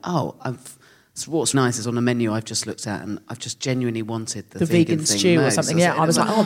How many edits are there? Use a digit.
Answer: 1